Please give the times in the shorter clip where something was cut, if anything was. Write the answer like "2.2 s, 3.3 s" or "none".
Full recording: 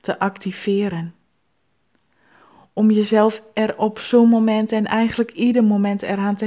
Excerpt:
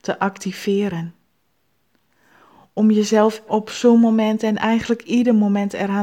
3.5 s